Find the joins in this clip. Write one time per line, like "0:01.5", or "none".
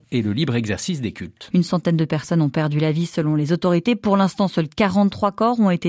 0:01.5